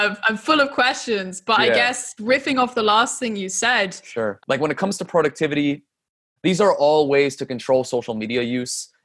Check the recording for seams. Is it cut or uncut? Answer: cut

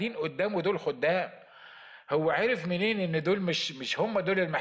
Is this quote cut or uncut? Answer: uncut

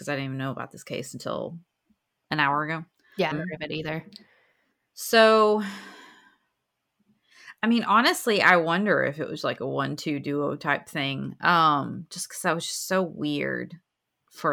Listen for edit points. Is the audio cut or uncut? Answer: cut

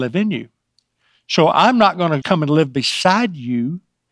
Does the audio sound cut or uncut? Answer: cut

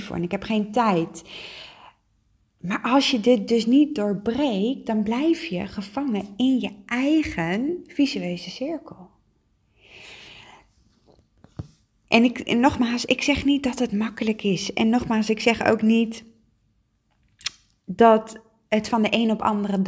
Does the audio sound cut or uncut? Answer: uncut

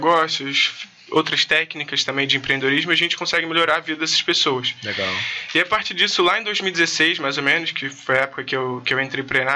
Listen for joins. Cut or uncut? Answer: uncut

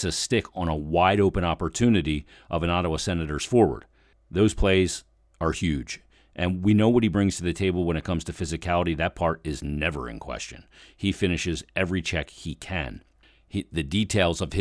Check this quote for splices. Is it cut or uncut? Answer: uncut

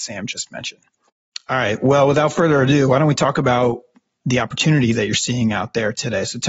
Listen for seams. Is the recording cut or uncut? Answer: uncut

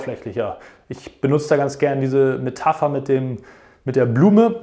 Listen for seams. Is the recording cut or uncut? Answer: uncut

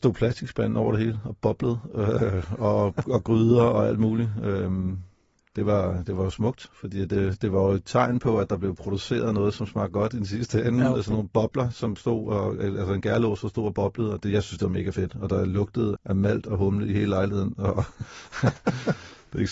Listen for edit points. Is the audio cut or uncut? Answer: cut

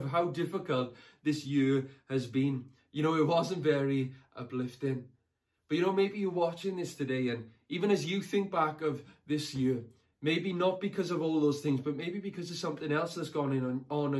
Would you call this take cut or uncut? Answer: uncut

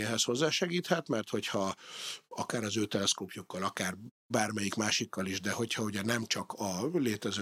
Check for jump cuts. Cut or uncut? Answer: uncut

